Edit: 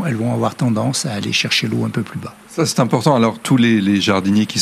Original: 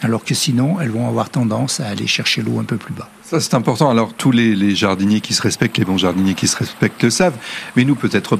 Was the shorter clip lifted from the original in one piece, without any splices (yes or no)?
yes